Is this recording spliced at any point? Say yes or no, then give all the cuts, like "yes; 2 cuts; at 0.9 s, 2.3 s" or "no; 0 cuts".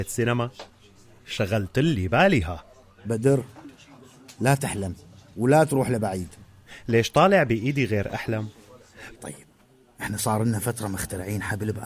yes; 1 cut; at 9.1 s